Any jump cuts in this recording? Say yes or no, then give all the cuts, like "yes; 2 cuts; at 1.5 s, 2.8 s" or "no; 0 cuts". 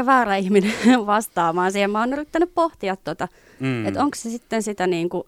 no; 0 cuts